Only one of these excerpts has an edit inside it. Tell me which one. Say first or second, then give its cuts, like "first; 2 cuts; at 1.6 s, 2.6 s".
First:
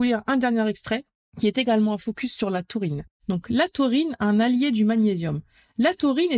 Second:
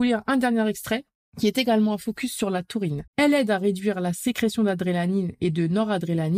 second; 1 cut; at 3.1 s